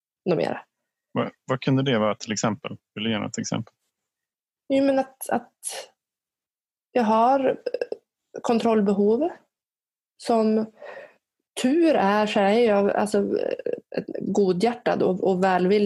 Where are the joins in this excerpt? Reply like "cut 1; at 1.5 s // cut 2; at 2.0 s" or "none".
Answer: none

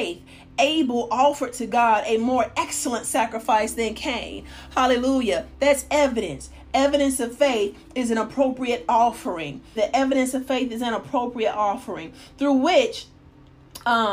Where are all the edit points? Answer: cut 1; at 9.8 s

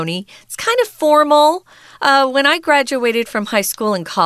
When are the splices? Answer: none

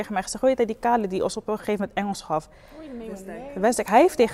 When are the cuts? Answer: none

